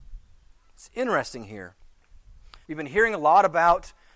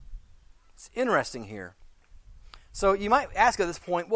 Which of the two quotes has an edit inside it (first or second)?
first